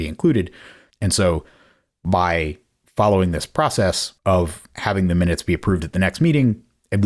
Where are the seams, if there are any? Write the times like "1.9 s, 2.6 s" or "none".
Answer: 0.9 s, 4.2 s